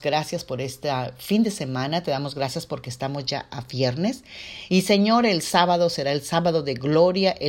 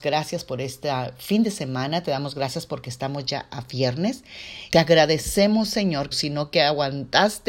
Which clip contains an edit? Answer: second; 2 cuts; at 4.7 s, 6.1 s

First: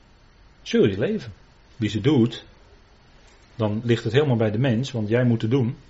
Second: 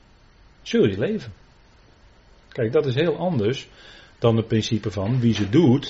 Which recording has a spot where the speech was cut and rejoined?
first; 1 cut; at 1.7 s

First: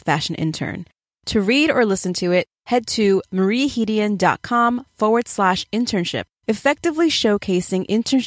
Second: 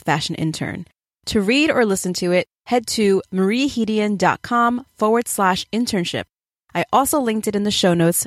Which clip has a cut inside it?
first; 1 cut; at 6.4 s

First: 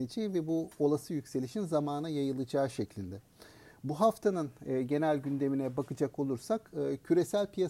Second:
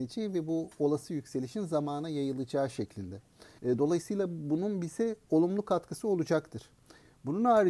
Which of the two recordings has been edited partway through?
second; 1 cut; at 3.6 s

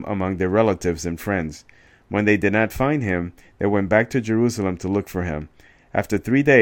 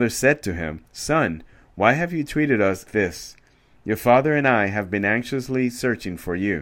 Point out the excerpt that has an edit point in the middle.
second; 1 cut; at 2.9 s

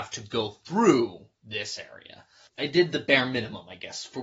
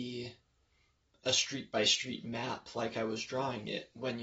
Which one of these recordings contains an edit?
first; 1 cut; at 1.3 s

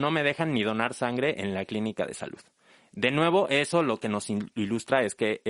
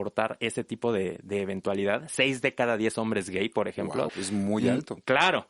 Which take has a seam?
second; 1 cut; at 4.1 s

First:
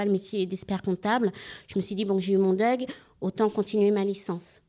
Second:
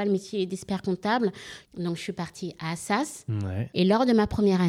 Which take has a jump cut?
second; 2 cuts; at 1.6 s, 3.7 s

